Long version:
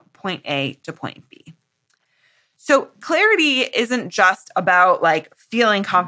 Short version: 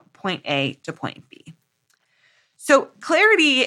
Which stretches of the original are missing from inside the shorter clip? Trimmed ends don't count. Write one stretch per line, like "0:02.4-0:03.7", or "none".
none

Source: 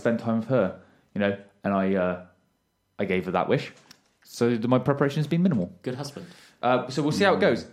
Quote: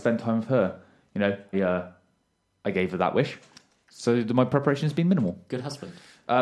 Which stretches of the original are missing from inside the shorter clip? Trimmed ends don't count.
0:01.5-0:01.9

